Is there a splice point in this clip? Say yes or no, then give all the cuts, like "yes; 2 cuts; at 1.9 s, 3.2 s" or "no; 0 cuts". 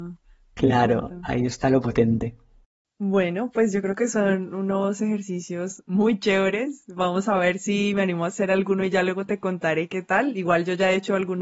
no; 0 cuts